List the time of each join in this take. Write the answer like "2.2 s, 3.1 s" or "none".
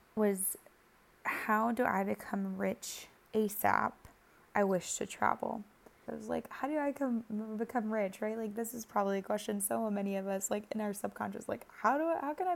6.1 s